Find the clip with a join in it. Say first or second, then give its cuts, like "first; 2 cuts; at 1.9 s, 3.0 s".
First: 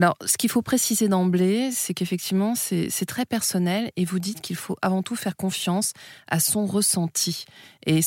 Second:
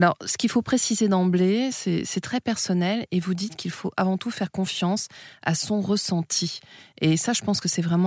second; 1 cut; at 1.7 s